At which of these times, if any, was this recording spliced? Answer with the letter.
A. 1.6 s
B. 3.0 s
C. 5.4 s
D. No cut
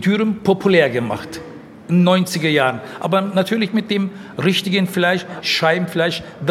C